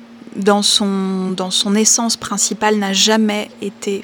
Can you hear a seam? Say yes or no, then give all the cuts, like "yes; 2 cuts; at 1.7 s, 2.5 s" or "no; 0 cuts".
no; 0 cuts